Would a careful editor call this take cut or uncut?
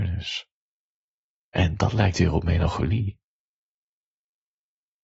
cut